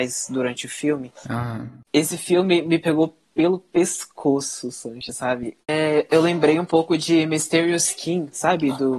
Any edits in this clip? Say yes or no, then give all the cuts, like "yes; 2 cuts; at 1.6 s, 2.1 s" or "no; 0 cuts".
yes; 2 cuts; at 1.8 s, 5.6 s